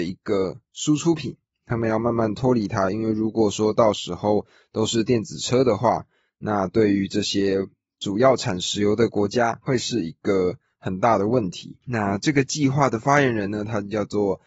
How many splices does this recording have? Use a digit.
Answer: 0